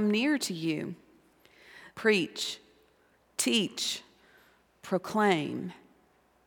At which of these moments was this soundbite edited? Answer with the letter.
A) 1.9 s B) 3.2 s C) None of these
A